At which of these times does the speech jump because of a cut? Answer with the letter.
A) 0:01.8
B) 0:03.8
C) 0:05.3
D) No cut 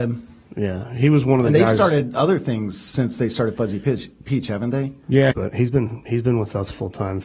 C